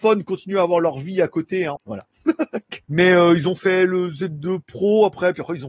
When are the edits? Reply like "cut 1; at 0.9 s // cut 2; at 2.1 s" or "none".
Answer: cut 1; at 1.8 s // cut 2; at 2.8 s